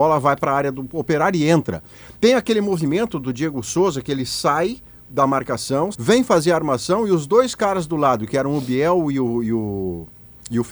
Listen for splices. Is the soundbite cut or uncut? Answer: cut